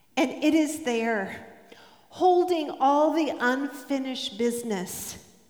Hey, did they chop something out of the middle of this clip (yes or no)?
no